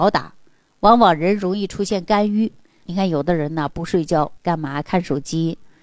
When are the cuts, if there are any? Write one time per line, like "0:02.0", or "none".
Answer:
0:02.8
0:04.4